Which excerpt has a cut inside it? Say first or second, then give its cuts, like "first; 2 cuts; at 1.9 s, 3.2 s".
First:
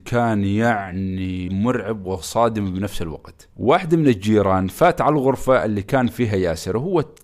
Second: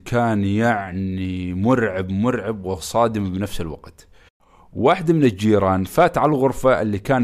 first; 2 cuts; at 1.5 s, 3.5 s